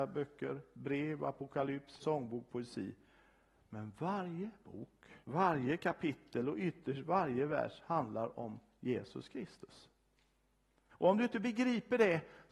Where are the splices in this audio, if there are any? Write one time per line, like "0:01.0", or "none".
0:02.0
0:05.2
0:10.9